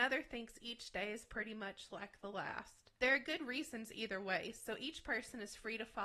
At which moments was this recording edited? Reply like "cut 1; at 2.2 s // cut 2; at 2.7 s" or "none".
cut 1; at 3.0 s

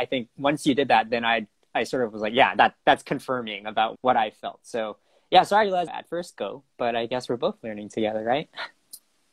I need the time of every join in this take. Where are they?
cut 1; at 3.9 s // cut 2; at 5.9 s

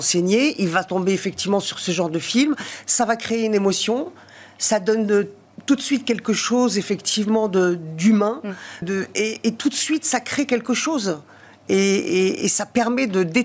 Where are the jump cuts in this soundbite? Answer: cut 1; at 8.8 s

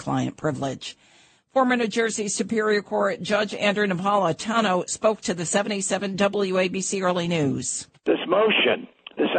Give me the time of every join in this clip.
cut 1; at 1.4 s

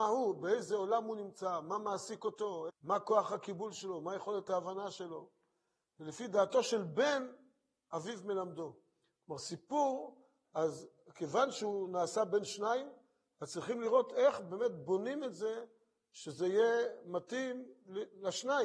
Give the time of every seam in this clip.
cut 1; at 2.7 s

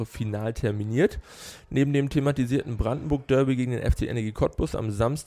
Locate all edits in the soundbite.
none

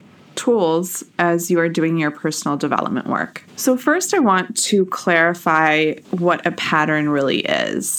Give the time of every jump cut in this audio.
cut 1; at 3.5 s // cut 2; at 6.0 s

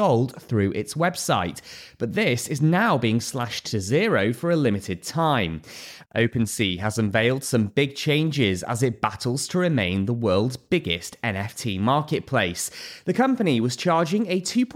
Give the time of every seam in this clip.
cut 1; at 6.0 s

